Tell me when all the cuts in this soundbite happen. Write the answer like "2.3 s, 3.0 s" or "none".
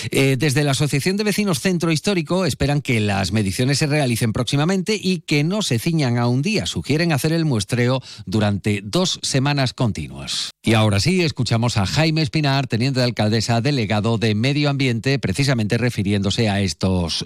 10.5 s